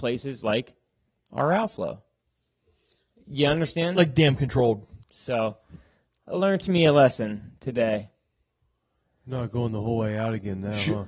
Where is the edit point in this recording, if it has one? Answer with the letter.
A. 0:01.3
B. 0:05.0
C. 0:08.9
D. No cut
B